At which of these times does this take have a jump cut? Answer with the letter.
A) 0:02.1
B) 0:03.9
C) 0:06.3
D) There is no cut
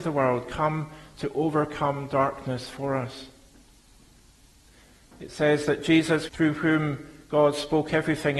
C